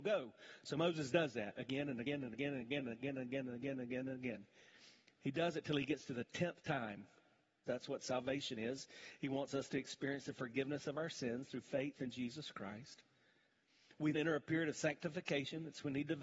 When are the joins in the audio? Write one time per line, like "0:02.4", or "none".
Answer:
0:07.7
0:14.1